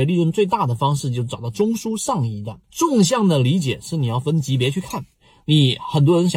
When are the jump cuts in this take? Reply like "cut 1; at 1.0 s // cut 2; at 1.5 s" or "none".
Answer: cut 1; at 2.6 s

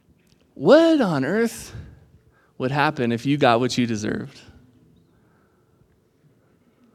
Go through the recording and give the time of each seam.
none

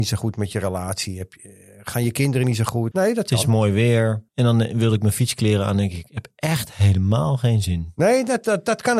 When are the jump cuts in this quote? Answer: cut 1; at 2.9 s // cut 2; at 4.3 s

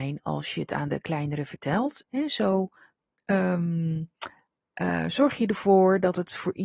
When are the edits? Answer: cut 1; at 2.0 s

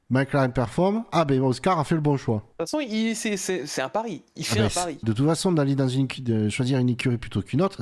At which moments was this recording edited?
cut 1; at 2.5 s // cut 2; at 5.0 s

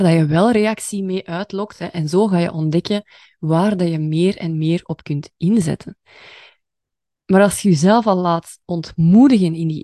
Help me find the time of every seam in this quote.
none

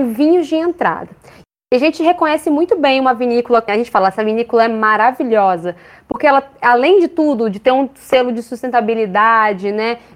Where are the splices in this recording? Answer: cut 1; at 3.7 s

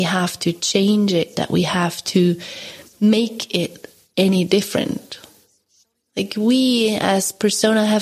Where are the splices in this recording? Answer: none

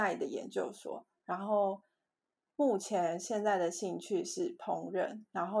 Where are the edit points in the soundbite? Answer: none

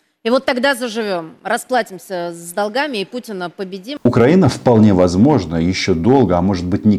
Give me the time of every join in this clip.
none

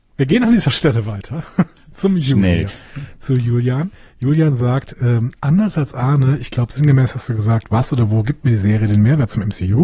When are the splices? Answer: cut 1; at 2.7 s

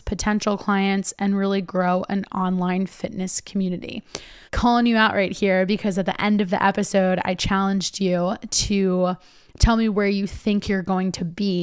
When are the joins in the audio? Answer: cut 1; at 4.5 s

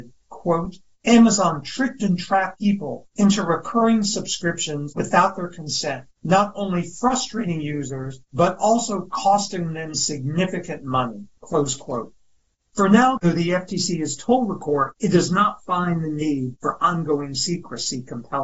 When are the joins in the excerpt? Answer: cut 1; at 11.4 s // cut 2; at 13.2 s

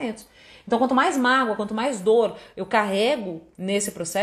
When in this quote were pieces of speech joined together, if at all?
none

